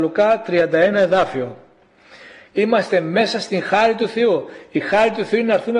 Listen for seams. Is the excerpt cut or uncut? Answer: cut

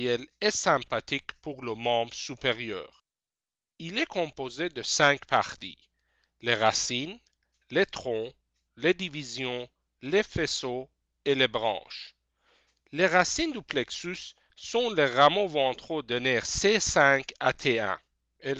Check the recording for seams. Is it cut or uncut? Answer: uncut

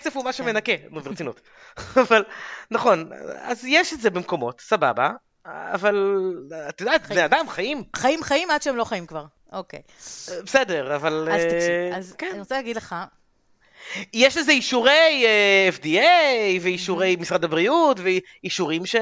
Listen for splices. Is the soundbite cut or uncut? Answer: uncut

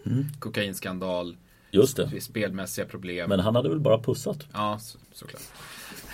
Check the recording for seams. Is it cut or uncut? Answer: cut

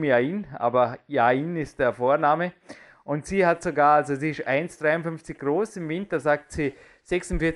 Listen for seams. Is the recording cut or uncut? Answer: uncut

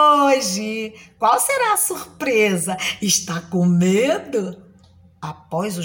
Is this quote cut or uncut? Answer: uncut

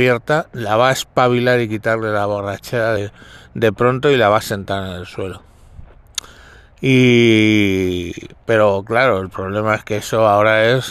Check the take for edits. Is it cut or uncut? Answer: uncut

